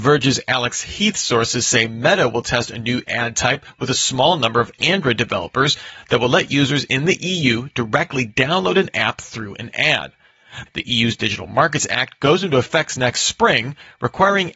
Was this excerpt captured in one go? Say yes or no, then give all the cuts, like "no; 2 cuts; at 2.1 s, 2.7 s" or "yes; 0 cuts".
no; 1 cut; at 10.7 s